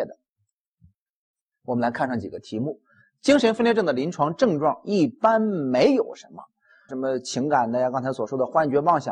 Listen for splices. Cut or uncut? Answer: cut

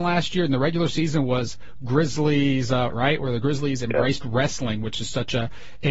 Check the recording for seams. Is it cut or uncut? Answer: cut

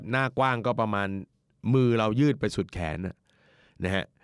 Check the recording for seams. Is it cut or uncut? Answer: uncut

